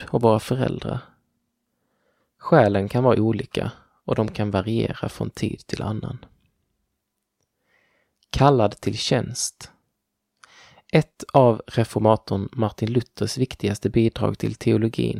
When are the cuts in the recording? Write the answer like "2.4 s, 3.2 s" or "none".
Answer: none